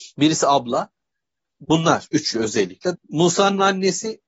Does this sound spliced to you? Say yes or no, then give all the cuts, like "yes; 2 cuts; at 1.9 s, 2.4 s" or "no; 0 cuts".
yes; 2 cuts; at 1.6 s, 2.9 s